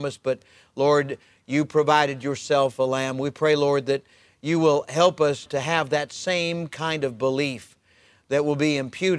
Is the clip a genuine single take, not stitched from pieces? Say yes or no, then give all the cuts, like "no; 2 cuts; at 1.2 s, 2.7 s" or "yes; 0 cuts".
no; 1 cut; at 5.5 s